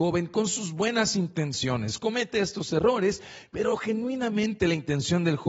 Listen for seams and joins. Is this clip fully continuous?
yes; 0 cuts

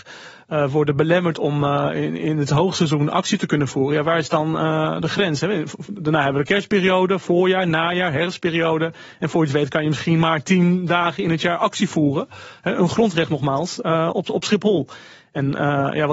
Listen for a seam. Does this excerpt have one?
no; 0 cuts

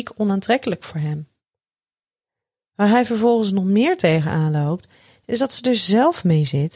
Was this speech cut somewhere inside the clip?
no; 0 cuts

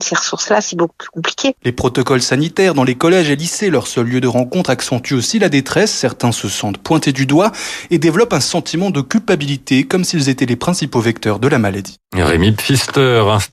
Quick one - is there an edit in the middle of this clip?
no; 0 cuts

